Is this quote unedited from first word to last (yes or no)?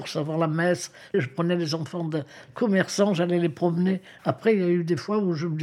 no